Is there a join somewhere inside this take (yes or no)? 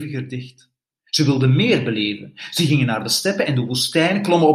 yes